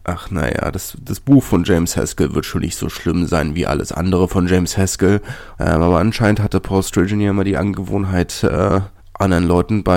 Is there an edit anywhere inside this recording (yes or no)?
yes